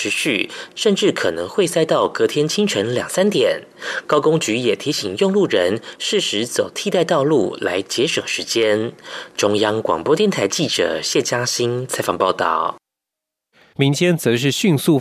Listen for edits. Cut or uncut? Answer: cut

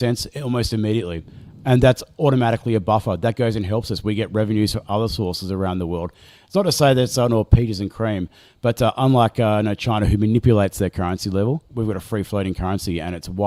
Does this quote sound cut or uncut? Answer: cut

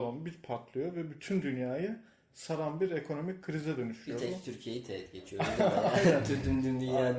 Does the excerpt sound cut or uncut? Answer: uncut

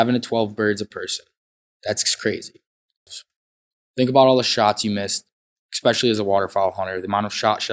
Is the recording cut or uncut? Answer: cut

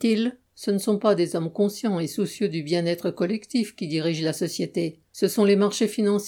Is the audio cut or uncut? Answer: uncut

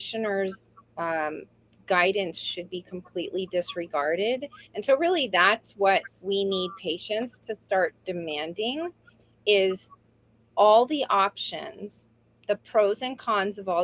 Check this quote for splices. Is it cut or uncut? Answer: cut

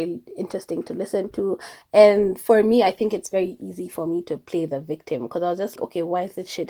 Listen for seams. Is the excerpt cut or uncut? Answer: cut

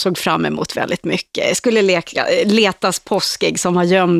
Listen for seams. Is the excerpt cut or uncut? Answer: uncut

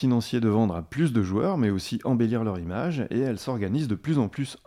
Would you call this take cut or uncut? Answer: uncut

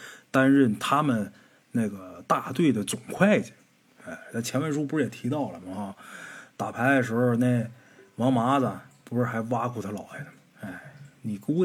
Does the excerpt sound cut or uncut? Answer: uncut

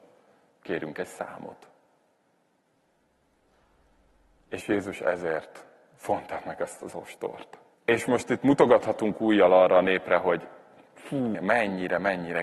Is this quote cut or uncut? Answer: cut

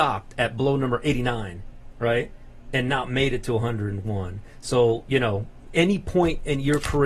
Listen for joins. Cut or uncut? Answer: uncut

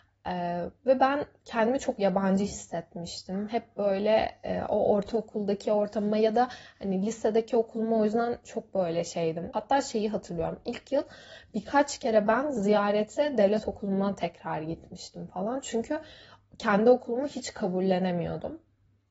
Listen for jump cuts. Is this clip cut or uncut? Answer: cut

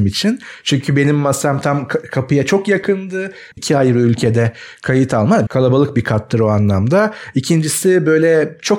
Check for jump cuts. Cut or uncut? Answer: cut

